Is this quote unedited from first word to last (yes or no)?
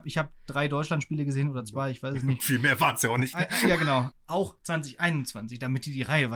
no